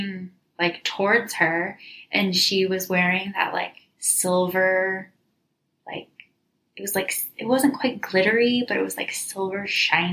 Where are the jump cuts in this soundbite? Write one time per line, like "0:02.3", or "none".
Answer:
none